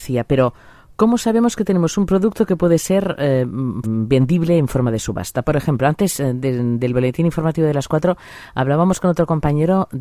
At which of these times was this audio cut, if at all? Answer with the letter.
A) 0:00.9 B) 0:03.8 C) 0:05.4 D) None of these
B